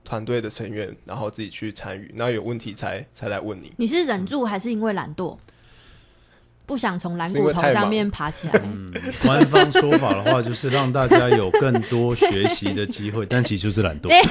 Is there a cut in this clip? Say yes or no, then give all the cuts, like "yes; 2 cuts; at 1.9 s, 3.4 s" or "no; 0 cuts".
no; 0 cuts